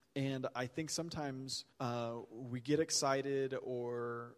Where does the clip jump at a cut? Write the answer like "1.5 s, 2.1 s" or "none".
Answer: 1.7 s